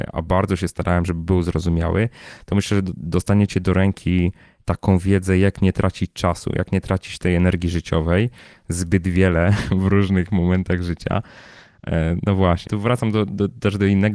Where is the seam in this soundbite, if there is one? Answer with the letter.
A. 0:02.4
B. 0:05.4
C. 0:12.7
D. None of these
C